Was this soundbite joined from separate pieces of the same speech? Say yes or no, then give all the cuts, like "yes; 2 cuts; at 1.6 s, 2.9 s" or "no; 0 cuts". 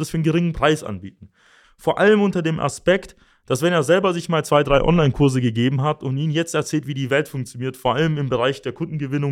yes; 1 cut; at 1.6 s